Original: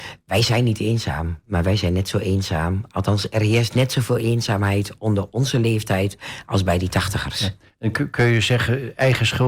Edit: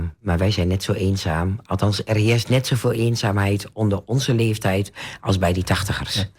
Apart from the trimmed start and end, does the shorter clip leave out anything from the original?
no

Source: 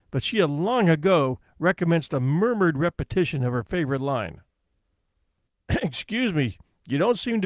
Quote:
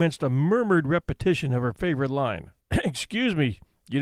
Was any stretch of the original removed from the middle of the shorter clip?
yes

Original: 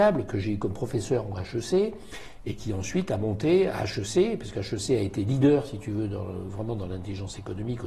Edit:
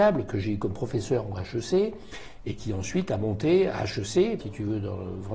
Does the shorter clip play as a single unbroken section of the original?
no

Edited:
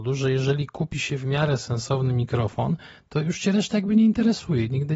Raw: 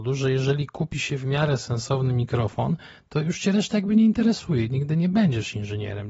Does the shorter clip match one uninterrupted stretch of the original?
yes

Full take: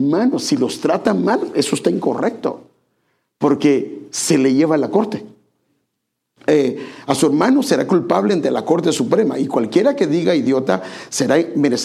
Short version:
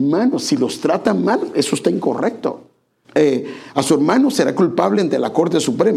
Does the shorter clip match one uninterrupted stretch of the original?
no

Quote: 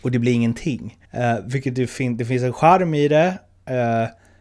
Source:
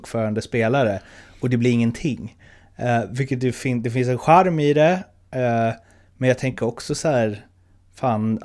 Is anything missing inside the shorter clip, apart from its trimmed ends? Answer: yes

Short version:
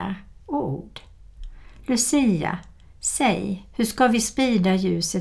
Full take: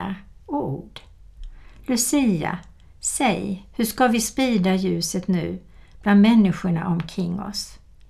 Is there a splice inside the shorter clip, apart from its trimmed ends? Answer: no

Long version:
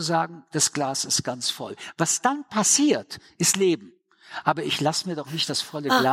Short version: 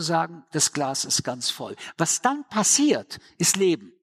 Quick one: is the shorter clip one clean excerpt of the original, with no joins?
yes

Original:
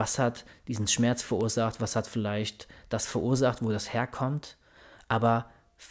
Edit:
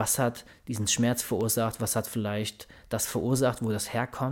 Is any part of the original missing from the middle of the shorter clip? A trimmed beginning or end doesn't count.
no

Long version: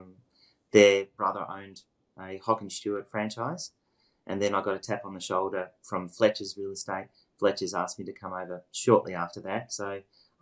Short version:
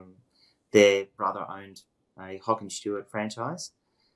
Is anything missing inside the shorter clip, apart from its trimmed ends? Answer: no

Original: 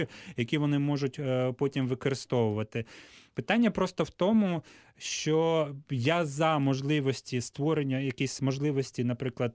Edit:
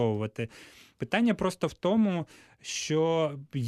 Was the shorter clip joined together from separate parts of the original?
no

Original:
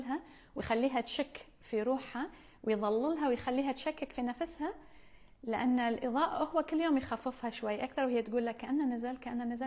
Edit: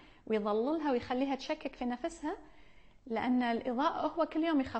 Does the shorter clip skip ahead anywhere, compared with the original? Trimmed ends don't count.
no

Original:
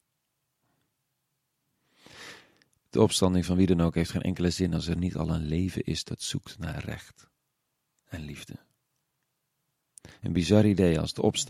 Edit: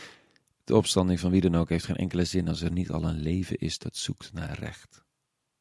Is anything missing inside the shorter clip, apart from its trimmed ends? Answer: no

